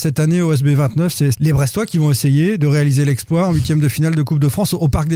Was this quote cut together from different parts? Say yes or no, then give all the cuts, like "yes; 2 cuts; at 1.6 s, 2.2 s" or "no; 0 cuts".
yes; 1 cut; at 1.3 s